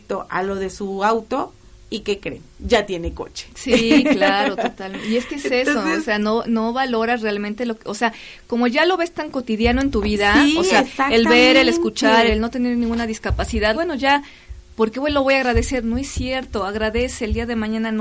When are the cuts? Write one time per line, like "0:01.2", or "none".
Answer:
0:12.3
0:13.7